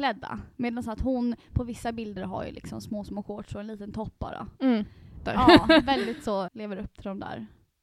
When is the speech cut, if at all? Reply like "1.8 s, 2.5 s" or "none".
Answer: 5.3 s, 6.5 s